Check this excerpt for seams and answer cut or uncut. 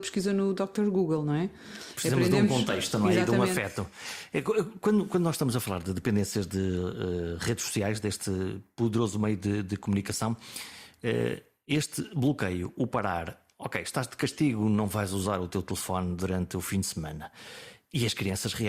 uncut